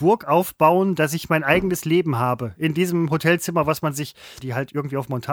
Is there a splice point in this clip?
yes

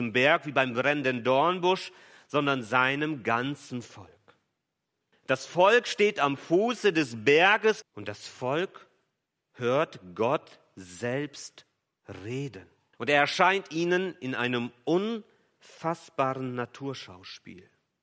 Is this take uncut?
no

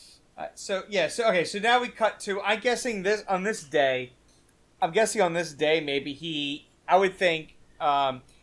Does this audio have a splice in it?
no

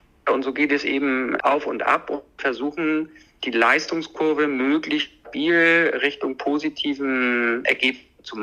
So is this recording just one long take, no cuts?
yes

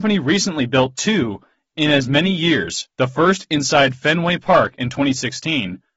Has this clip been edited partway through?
yes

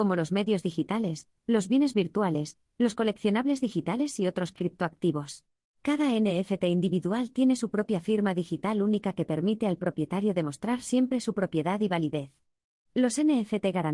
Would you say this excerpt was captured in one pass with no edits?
no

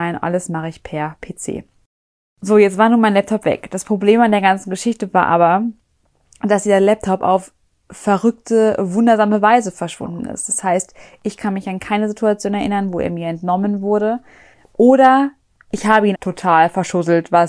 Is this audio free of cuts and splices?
no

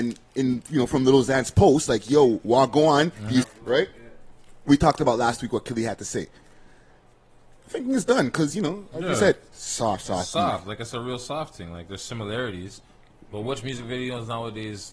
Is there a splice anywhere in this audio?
yes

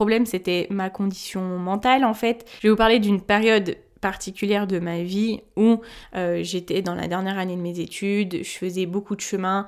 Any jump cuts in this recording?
no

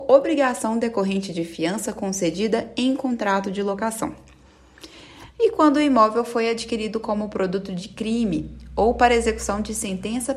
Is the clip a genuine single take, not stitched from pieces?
no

